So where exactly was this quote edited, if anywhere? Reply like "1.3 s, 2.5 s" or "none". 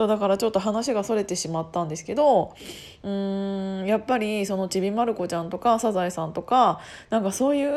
none